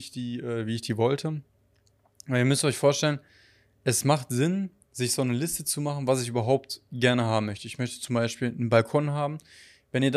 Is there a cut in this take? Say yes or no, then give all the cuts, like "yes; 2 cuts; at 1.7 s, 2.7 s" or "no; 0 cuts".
no; 0 cuts